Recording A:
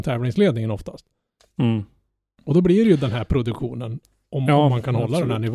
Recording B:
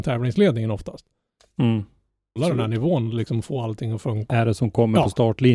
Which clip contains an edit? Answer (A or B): B